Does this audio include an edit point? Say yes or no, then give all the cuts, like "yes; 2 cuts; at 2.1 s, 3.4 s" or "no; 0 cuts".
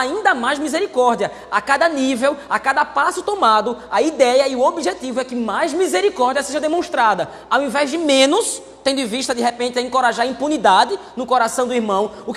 no; 0 cuts